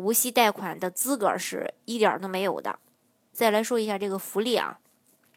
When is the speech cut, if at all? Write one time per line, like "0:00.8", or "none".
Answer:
0:03.3